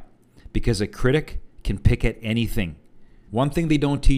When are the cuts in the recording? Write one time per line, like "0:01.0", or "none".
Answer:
0:03.3